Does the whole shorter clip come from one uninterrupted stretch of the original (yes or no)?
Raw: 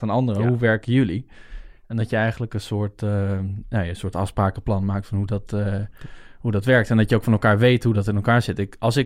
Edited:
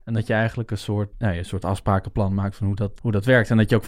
no